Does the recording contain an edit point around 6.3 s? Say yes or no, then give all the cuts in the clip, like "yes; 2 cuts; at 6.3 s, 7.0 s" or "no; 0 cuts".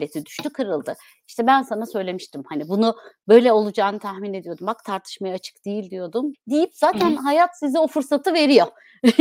yes; 1 cut; at 6.3 s